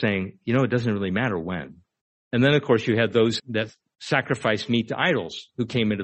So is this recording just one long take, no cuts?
no; 2 cuts; at 2.2 s, 3.4 s

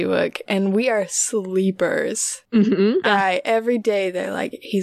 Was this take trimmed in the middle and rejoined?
yes; 1 cut; at 3.0 s

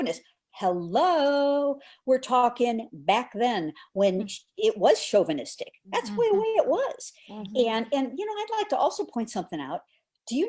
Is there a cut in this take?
no; 0 cuts

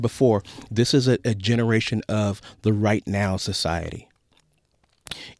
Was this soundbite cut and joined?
no; 0 cuts

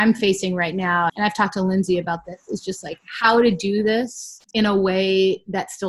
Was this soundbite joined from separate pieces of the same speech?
yes; 2 cuts; at 1.1 s, 4.4 s

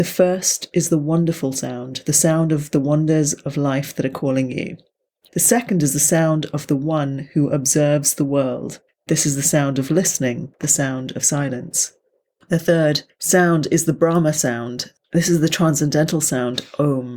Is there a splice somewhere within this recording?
yes; 1 cut; at 5.3 s

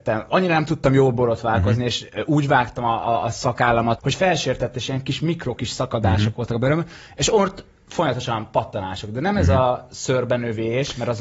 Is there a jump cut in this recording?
yes; 1 cut; at 4.0 s

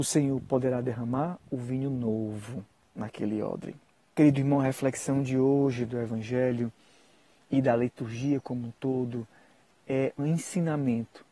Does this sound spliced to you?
yes; 2 cuts; at 4.1 s, 10.2 s

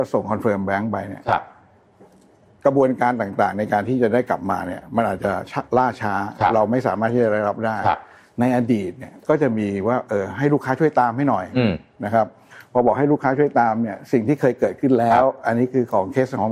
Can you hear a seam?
no; 0 cuts

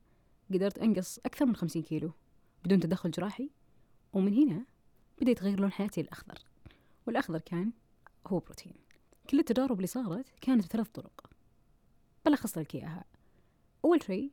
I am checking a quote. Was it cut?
no; 0 cuts

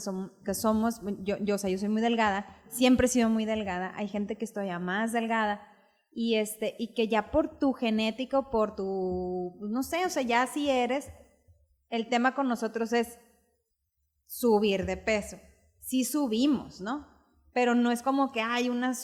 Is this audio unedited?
yes; 0 cuts

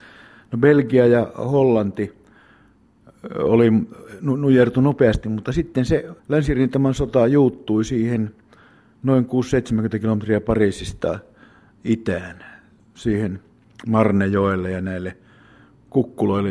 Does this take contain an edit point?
yes; 1 cut; at 6.2 s

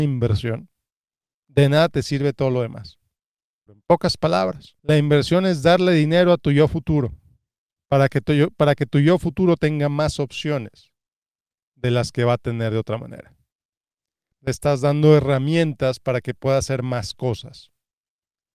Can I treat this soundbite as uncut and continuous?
no; 3 cuts; at 3.7 s, 4.8 s, 14.3 s

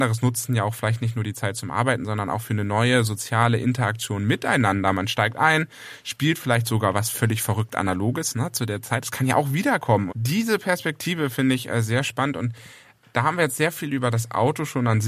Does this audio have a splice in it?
yes; 1 cut; at 10.1 s

